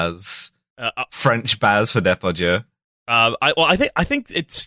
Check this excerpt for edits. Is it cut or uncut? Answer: uncut